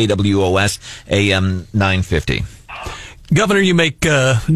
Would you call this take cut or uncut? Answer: uncut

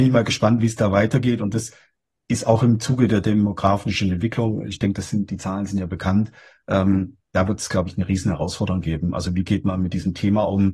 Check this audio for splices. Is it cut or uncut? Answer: uncut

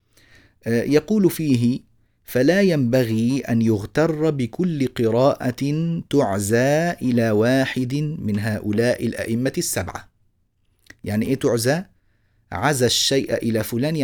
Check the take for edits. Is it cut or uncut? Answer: uncut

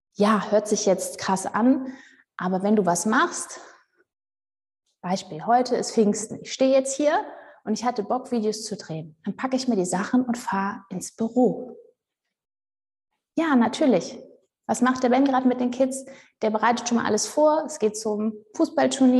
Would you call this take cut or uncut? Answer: uncut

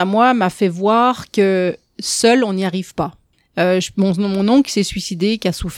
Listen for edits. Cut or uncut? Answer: uncut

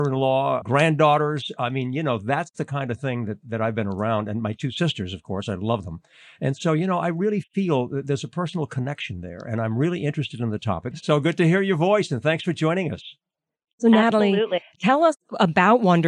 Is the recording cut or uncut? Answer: cut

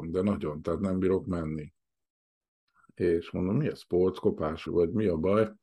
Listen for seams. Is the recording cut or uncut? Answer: cut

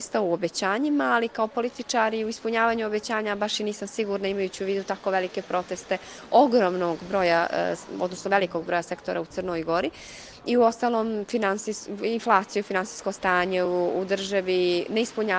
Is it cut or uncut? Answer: uncut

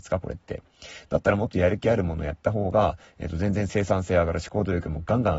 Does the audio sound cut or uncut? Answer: uncut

